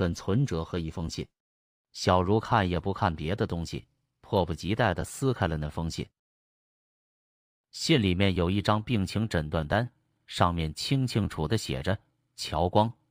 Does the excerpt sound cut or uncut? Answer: cut